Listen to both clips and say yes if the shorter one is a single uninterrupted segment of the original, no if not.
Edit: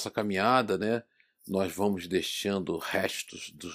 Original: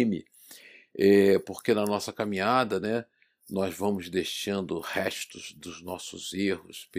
yes